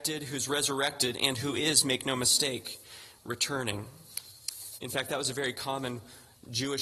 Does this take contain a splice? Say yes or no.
yes